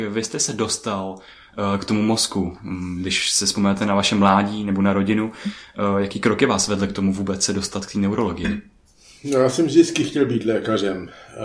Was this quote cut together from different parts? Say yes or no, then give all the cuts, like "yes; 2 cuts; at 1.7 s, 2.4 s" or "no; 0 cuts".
no; 0 cuts